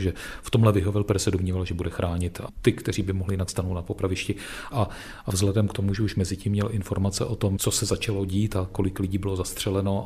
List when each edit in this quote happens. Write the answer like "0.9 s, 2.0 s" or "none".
4.7 s